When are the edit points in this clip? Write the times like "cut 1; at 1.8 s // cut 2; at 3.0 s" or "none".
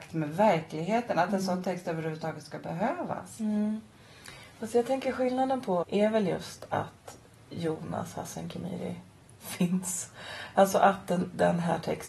cut 1; at 5.8 s